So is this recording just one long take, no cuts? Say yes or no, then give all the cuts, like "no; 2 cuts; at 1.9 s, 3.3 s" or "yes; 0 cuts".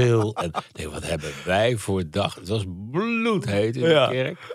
yes; 0 cuts